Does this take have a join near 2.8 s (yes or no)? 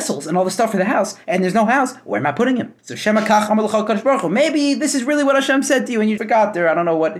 yes